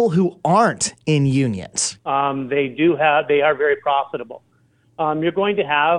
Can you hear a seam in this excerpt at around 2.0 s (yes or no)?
yes